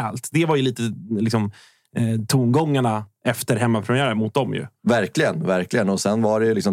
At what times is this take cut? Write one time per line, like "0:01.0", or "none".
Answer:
none